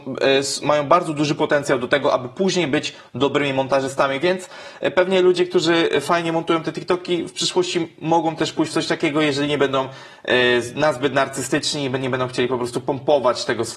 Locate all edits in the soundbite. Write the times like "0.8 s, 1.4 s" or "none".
none